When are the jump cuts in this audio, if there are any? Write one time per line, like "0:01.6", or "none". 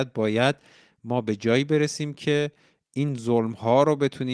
none